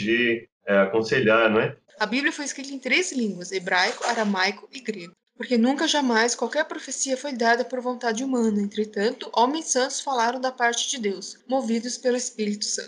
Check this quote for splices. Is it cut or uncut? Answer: cut